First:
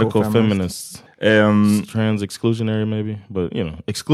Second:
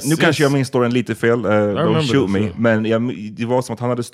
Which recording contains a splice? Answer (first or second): first